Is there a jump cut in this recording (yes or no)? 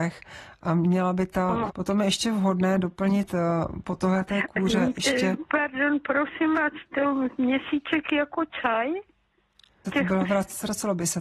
yes